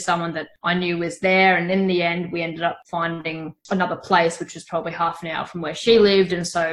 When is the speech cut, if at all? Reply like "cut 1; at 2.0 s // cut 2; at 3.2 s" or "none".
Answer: none